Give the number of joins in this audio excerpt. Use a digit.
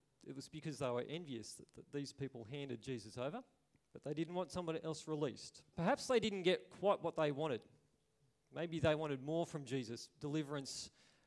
1